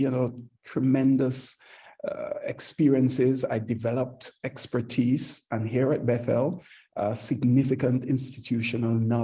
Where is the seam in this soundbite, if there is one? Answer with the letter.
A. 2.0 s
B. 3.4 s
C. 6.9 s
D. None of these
D